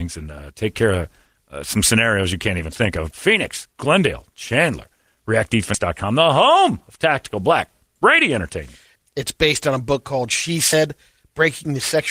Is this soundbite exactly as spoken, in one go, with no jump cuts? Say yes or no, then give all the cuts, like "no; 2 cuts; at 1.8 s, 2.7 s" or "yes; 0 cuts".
no; 2 cuts; at 3.1 s, 9.0 s